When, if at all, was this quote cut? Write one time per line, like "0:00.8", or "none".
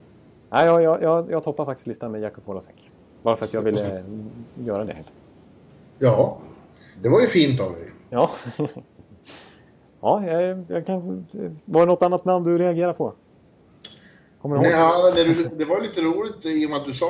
0:10.7